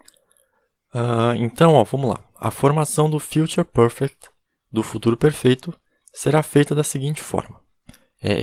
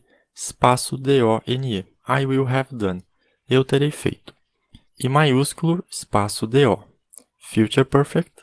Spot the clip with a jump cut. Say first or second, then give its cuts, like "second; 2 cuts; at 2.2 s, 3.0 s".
second; 1 cut; at 4.9 s